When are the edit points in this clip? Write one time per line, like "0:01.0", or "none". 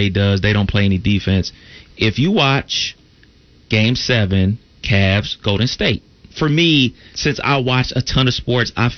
0:06.3